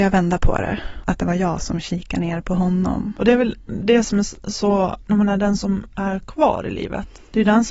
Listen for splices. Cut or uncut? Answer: cut